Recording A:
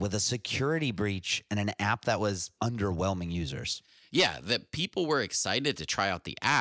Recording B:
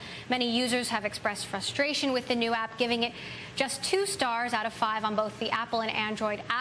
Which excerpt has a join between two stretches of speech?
A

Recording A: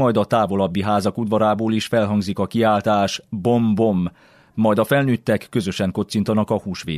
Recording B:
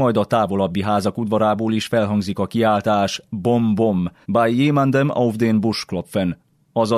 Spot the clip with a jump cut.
B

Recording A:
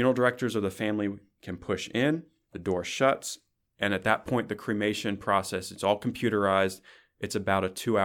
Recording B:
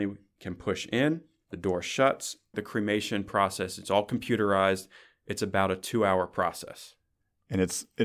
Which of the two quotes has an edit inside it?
B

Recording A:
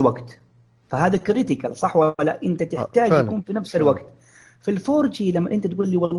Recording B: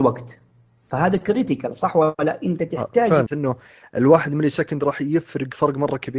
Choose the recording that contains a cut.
B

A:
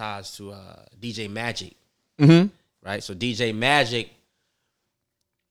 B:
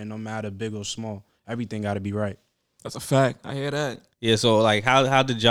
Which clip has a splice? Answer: B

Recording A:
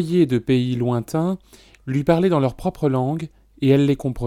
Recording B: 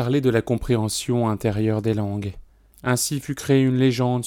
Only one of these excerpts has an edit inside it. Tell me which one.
B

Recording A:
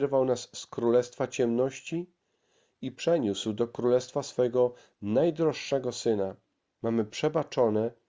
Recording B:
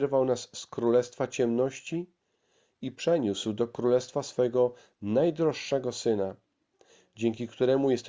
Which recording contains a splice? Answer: A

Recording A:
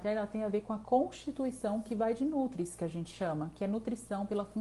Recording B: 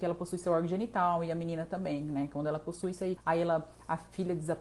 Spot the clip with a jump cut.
B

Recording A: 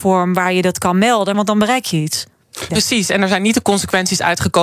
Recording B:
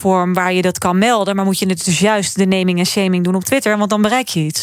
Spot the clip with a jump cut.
A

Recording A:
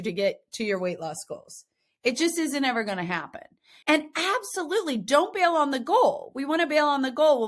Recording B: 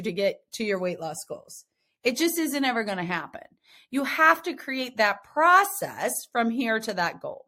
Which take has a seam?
A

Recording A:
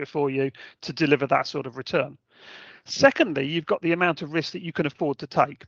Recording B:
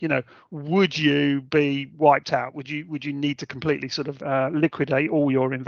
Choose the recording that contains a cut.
B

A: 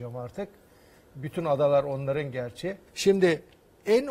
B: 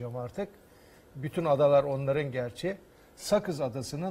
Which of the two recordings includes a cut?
A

